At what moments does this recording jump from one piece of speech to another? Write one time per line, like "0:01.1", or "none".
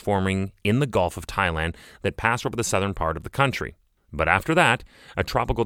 0:04.0